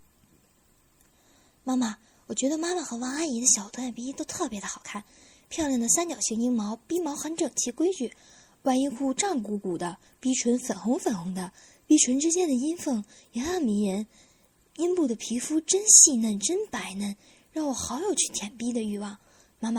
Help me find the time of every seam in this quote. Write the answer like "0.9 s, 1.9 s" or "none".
10.1 s